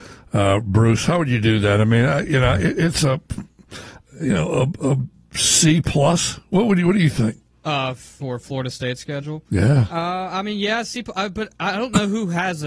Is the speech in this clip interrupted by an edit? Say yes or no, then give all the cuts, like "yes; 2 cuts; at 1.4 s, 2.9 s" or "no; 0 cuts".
no; 0 cuts